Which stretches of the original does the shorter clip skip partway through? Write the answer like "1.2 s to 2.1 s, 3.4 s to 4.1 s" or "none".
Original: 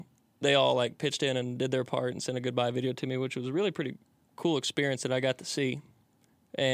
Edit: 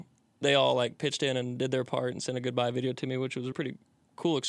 3.5 s to 3.7 s